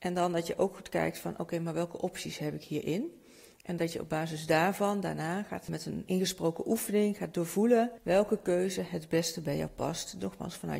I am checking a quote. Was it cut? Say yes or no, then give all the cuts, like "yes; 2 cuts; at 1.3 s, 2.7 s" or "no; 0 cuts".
yes; 1 cut; at 6.1 s